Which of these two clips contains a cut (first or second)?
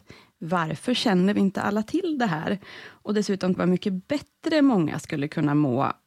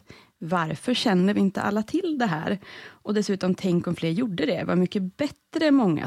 first